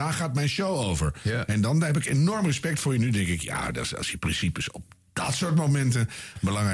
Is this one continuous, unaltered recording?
yes; 0 cuts

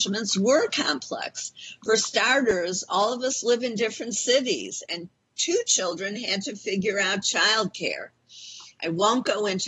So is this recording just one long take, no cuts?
yes; 0 cuts

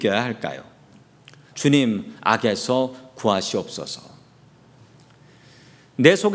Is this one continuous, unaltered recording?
no; 1 cut; at 1.5 s

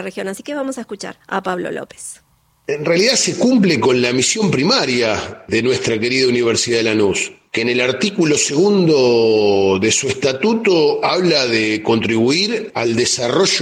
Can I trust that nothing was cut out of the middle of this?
yes; 0 cuts

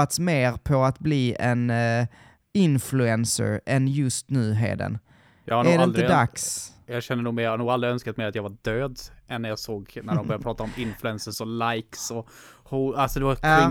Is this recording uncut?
yes; 0 cuts

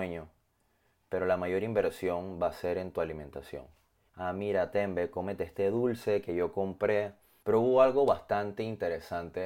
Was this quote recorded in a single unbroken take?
no; 2 cuts; at 4.1 s, 7.4 s

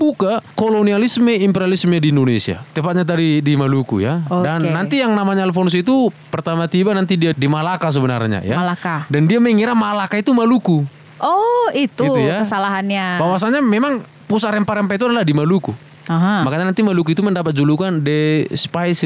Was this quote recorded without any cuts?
no; 1 cut; at 7.3 s

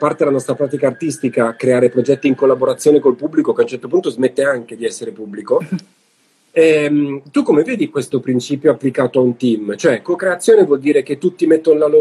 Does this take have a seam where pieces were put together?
no; 0 cuts

